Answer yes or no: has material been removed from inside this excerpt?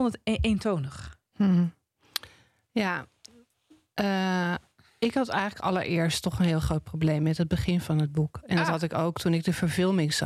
no